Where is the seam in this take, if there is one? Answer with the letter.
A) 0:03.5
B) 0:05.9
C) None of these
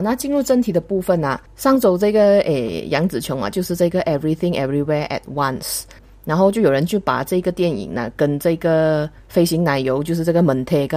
A